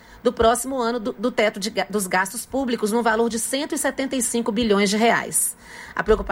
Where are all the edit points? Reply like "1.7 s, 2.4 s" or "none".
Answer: none